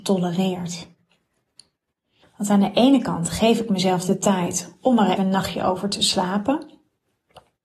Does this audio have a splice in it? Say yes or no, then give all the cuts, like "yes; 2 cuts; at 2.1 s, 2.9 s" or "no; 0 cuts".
yes; 2 cuts; at 2.2 s, 5.2 s